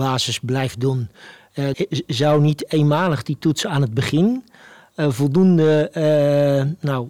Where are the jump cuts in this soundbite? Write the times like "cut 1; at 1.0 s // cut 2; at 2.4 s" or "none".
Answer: cut 1; at 1.7 s